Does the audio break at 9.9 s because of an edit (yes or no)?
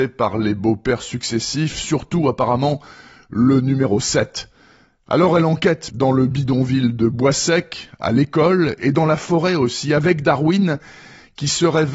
no